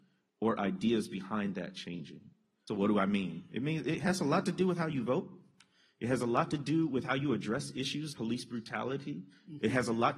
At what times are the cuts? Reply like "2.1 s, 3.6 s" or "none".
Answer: 2.7 s, 8.1 s